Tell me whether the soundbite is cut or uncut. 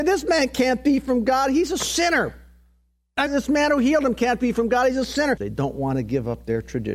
cut